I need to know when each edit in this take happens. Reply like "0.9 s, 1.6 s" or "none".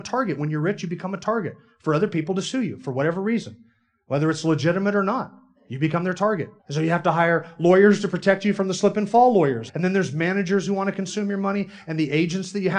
6.6 s, 9.7 s